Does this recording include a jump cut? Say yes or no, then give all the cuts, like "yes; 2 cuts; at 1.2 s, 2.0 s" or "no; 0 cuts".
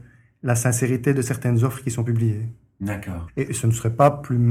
yes; 1 cut; at 3.3 s